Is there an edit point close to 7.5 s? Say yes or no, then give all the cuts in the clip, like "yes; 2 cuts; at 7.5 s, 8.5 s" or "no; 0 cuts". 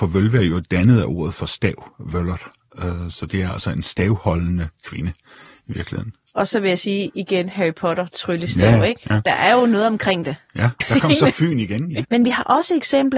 no; 2 cuts; at 10.8 s, 12.0 s